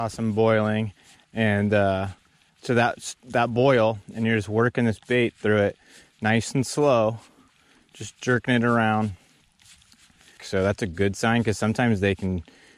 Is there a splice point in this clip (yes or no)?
yes